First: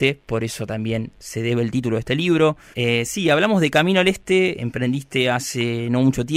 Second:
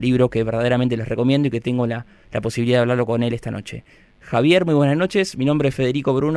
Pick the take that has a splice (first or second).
first